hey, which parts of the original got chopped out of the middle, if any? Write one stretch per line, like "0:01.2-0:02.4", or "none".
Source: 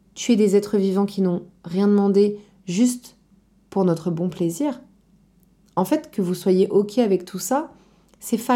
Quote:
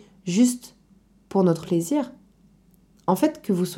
0:04.0-0:04.3